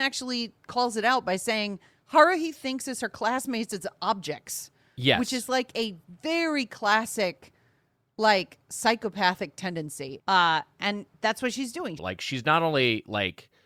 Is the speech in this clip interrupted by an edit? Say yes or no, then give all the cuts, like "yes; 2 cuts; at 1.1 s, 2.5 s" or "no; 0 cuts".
yes; 2 cuts; at 10.2 s, 12.0 s